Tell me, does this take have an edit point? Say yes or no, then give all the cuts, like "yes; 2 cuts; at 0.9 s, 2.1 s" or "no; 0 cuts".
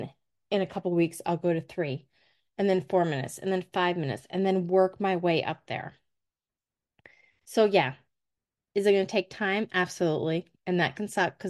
no; 0 cuts